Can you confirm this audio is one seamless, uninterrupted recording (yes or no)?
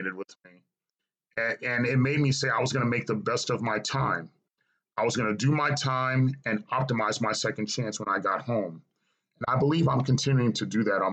yes